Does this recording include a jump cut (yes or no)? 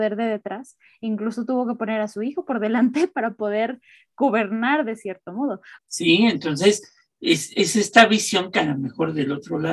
yes